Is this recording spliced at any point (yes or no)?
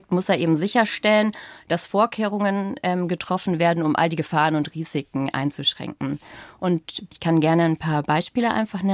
no